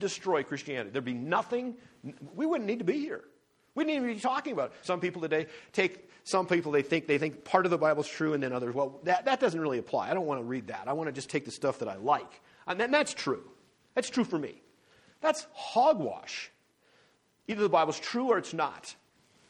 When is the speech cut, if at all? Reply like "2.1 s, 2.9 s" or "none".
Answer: 4.8 s